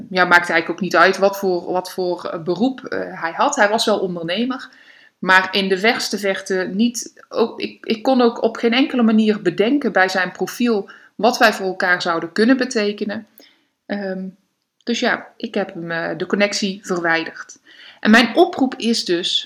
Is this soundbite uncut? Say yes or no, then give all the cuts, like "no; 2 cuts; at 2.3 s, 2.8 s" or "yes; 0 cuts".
yes; 0 cuts